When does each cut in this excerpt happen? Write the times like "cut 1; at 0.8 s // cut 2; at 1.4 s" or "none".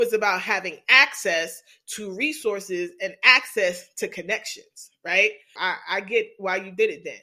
cut 1; at 5.6 s